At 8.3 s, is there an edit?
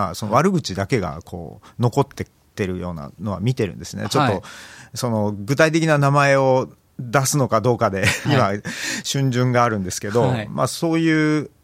yes; 1 cut; at 8.3 s

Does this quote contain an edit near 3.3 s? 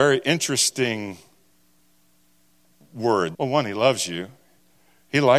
yes; 1 cut; at 3.3 s

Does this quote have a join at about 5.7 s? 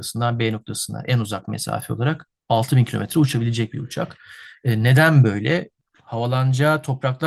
yes; 1 cut; at 5.7 s

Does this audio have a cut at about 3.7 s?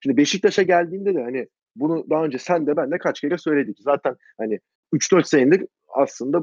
yes; 1 cut; at 3.7 s

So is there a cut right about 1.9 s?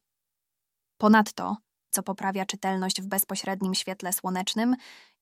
yes; 1 cut; at 1.9 s

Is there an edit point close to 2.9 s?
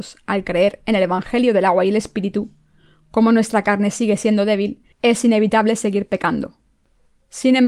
no; 1 cut; at 4.9 s

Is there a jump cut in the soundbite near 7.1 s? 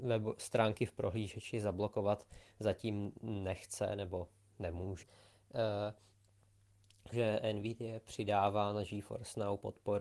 yes; 2 cuts; at 5.0 s, 7.1 s

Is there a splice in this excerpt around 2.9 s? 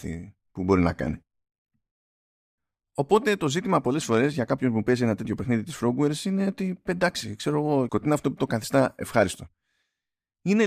no; 1 cut; at 7.9 s

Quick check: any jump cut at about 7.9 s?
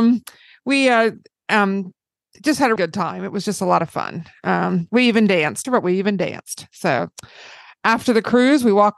no; 2 cuts; at 2.8 s, 5.6 s

